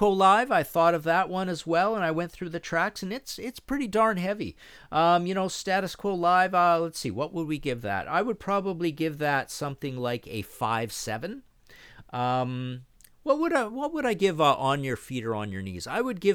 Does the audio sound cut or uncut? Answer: uncut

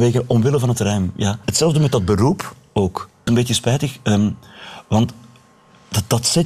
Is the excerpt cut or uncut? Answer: cut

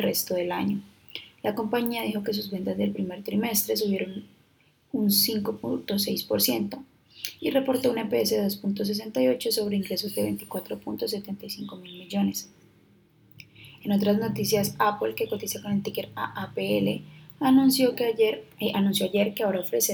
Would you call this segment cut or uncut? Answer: uncut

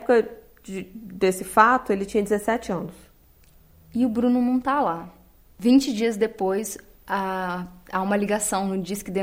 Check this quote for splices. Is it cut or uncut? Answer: uncut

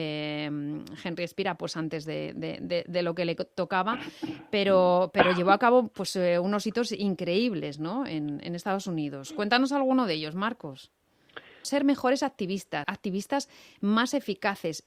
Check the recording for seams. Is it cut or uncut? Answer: cut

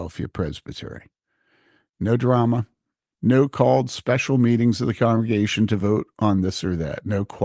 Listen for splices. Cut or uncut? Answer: cut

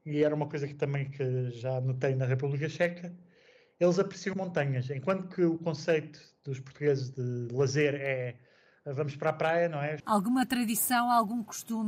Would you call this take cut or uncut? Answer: cut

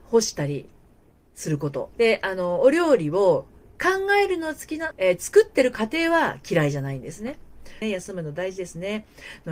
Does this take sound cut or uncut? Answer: cut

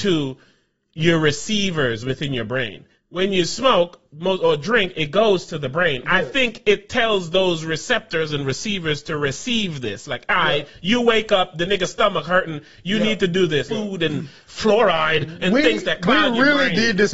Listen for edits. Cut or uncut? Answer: cut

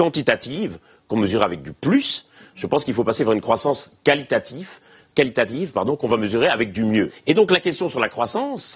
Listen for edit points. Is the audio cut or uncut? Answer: uncut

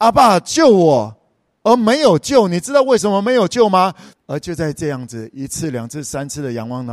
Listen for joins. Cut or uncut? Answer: cut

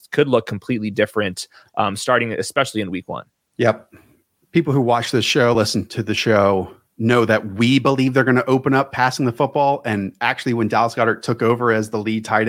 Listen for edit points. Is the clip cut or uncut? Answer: uncut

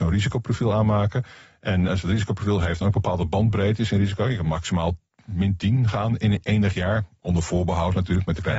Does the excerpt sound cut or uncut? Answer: cut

